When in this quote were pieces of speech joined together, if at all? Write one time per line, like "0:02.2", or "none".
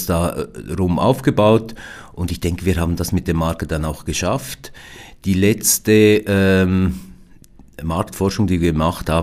none